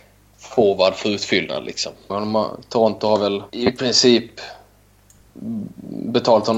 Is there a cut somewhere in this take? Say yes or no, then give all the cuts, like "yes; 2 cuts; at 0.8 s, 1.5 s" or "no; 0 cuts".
yes; 2 cuts; at 2.1 s, 3.5 s